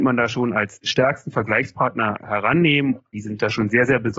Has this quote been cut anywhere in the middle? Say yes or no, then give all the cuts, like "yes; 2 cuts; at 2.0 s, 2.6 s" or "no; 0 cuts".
yes; 1 cut; at 3.1 s